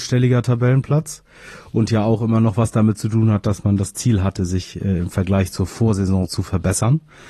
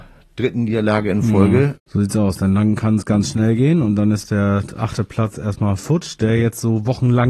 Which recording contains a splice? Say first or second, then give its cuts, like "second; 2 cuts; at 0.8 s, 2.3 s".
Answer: second; 1 cut; at 1.8 s